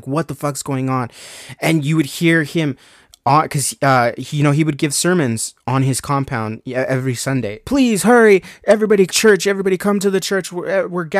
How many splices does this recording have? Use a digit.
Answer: 2